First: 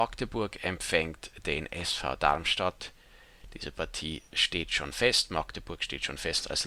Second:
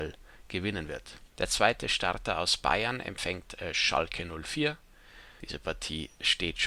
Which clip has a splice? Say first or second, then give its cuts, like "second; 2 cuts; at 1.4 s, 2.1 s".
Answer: second; 2 cuts; at 1.3 s, 5.4 s